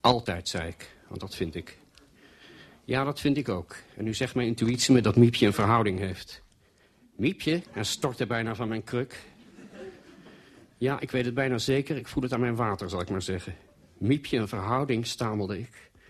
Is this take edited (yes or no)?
yes